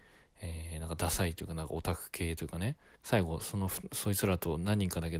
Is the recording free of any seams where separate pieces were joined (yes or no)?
no